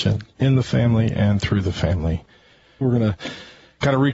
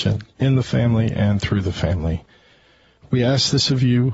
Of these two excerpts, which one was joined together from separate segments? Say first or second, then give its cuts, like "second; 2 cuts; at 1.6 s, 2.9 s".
first; 1 cut; at 2.8 s